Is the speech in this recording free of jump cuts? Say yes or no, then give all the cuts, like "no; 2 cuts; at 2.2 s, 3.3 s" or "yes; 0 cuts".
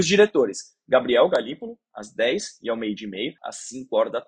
no; 1 cut; at 3.4 s